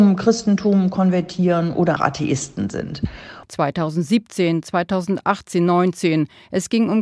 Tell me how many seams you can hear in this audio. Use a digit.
2